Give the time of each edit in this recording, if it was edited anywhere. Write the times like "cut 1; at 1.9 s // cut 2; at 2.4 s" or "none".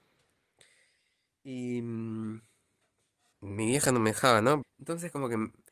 cut 1; at 3.3 s // cut 2; at 4.6 s